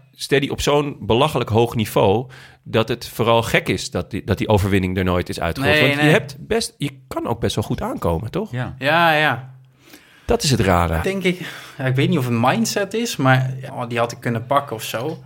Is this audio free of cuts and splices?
no; 2 cuts; at 11.0 s, 13.7 s

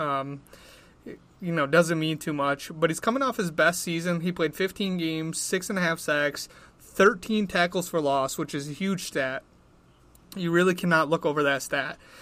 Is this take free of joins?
yes; 0 cuts

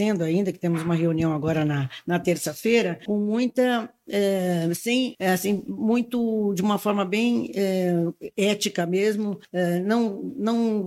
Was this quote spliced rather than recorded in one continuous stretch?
no; 0 cuts

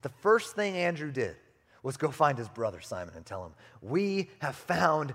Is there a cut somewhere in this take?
no; 0 cuts

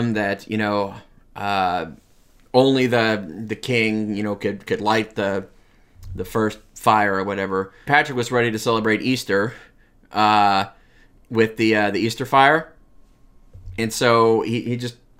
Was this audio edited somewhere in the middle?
yes; 1 cut; at 7.9 s

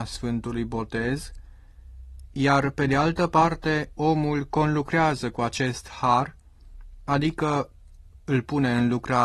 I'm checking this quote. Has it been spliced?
no; 0 cuts

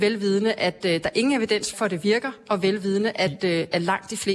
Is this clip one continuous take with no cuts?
no; 1 cut; at 1.7 s

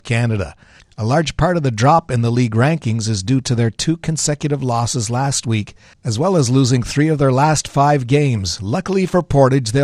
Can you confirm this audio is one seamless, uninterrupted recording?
yes; 0 cuts

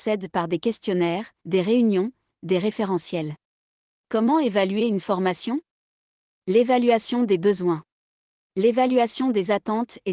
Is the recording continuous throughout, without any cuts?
no; 3 cuts; at 1.4 s, 3.9 s, 8.4 s

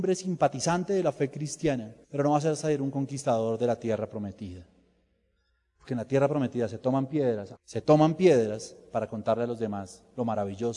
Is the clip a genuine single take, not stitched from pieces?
no; 2 cuts; at 2.0 s, 7.6 s

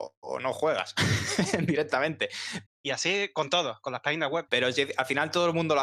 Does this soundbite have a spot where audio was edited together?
yes; 2 cuts; at 2.7 s, 4.5 s

